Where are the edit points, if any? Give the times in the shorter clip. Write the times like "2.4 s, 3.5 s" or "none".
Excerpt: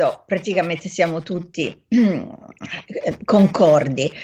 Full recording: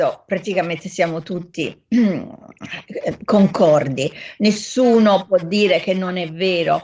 none